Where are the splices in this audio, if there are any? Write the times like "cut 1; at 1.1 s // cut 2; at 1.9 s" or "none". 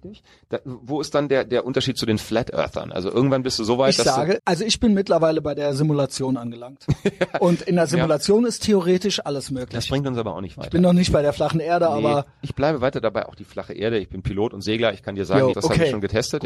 cut 1; at 4.4 s // cut 2; at 15.5 s